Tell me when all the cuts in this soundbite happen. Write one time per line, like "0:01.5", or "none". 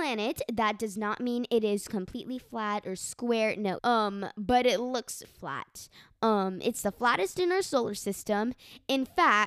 0:03.8
0:05.2